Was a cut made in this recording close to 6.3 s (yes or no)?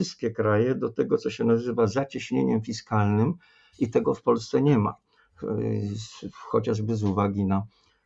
no